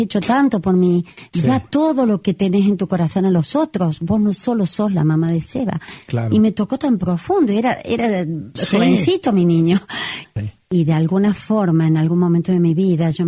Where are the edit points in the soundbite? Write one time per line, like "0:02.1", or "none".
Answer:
0:10.2